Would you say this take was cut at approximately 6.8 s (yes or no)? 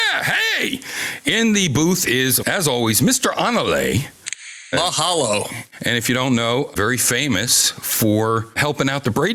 yes